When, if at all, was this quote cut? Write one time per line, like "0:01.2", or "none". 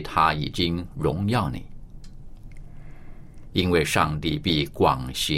0:03.5